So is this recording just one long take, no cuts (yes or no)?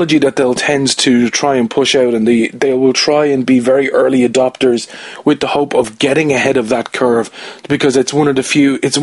yes